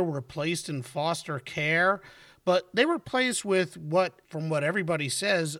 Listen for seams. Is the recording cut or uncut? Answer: cut